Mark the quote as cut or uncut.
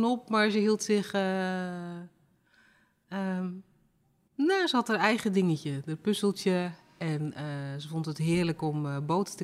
uncut